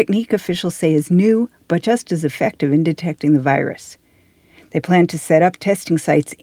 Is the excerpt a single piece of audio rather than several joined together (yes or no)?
yes